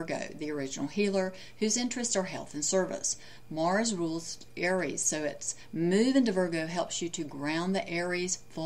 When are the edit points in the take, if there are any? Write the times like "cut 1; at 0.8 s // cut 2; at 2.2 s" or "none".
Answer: cut 1; at 3.4 s